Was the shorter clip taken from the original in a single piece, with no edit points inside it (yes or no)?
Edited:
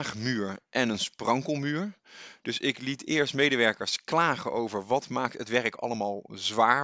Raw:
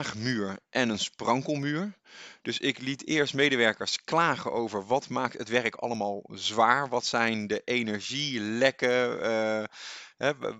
yes